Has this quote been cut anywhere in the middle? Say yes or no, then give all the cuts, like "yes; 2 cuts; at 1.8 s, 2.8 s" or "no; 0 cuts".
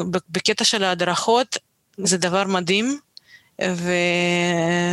yes; 1 cut; at 2.0 s